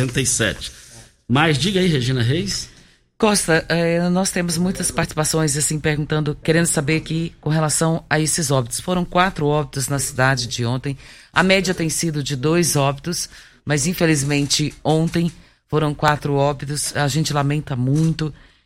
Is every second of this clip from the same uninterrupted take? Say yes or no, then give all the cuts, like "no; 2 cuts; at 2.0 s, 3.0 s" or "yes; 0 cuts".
yes; 0 cuts